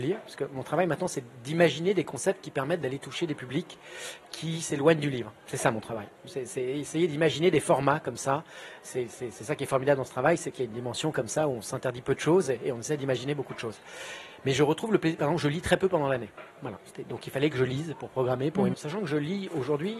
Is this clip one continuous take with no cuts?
no; 2 cuts; at 16.5 s, 18.7 s

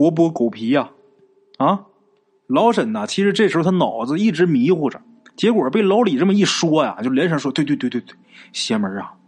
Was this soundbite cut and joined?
no; 0 cuts

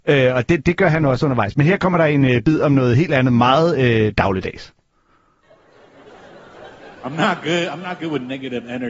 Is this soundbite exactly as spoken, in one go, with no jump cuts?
yes; 0 cuts

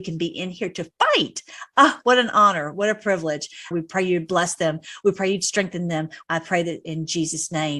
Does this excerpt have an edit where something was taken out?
yes; 2 cuts; at 3.7 s, 6.2 s

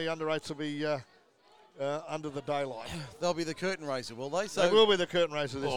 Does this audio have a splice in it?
no; 0 cuts

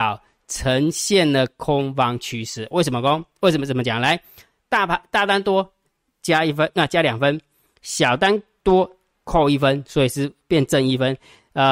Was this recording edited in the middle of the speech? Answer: no; 0 cuts

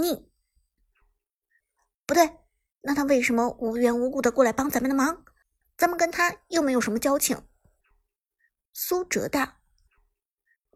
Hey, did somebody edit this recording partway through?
no; 0 cuts

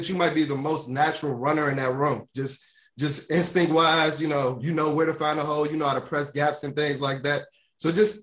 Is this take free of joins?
yes; 0 cuts

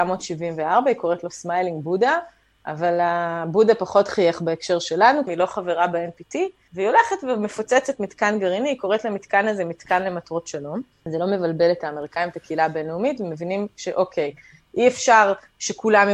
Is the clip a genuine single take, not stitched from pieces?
no; 1 cut; at 5.3 s

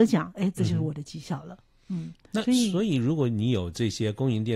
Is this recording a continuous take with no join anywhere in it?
yes; 0 cuts

